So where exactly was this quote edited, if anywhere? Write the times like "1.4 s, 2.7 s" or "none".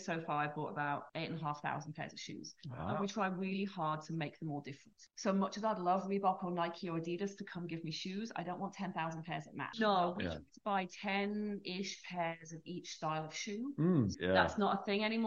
1.1 s, 9.7 s, 14.1 s